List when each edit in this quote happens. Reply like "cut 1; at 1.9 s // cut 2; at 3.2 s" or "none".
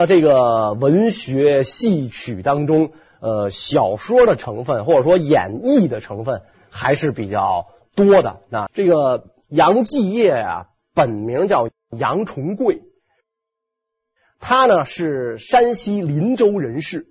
cut 1; at 8.7 s